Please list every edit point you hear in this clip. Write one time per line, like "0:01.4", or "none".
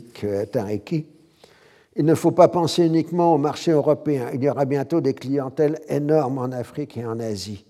none